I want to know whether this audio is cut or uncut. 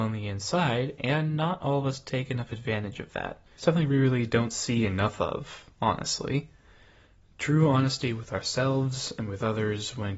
cut